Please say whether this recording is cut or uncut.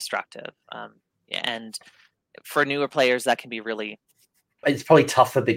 cut